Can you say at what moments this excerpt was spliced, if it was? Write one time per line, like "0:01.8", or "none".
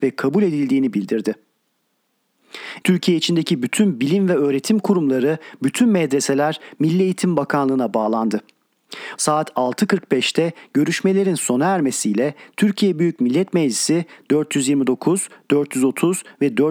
0:02.8
0:09.2